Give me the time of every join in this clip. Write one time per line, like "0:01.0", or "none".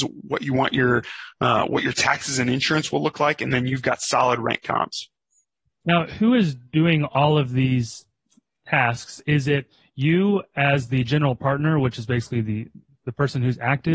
none